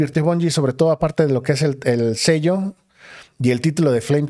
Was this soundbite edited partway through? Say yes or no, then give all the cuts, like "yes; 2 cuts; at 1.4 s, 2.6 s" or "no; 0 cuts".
no; 0 cuts